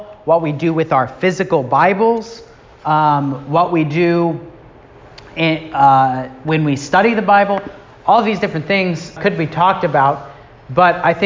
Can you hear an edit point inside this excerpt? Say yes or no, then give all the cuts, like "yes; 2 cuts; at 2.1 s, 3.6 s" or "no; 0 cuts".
yes; 1 cut; at 9.2 s